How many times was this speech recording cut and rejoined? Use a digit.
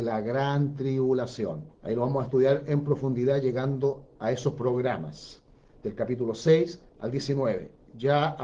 2